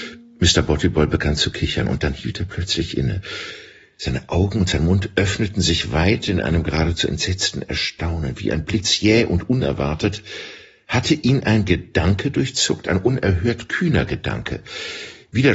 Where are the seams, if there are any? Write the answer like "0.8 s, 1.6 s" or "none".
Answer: none